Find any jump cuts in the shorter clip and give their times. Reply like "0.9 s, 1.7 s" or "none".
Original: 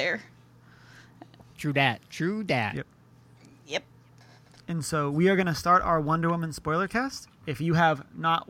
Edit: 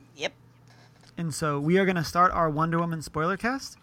none